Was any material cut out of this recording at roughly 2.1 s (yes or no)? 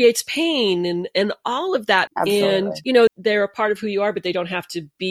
yes